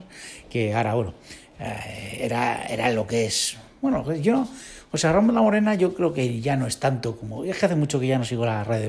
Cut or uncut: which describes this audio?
uncut